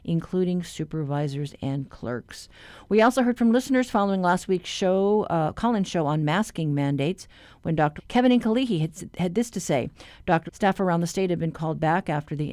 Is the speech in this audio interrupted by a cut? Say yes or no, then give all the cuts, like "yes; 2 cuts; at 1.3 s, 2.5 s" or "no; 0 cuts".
yes; 2 cuts; at 8.0 s, 10.5 s